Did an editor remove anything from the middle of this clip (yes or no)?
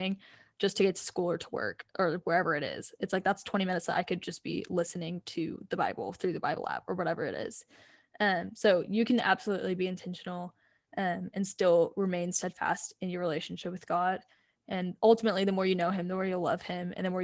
no